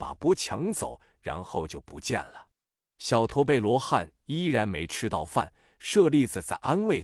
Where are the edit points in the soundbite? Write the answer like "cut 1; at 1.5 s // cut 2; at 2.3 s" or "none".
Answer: cut 1; at 2.8 s